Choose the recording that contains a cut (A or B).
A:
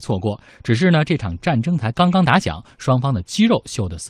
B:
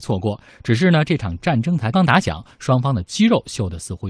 B